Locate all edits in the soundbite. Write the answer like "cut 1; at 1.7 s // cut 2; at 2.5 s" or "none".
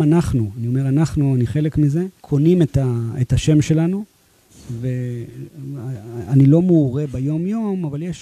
cut 1; at 2.2 s